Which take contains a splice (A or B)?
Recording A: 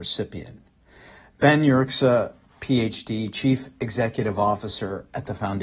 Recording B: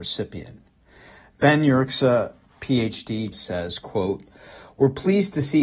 B